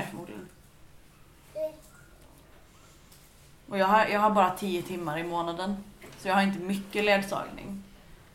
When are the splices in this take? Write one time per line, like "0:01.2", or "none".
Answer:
none